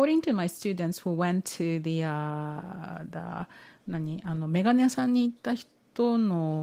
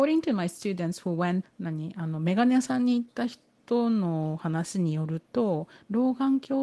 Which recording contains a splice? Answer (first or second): second